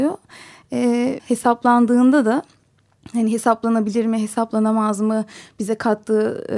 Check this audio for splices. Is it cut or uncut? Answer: cut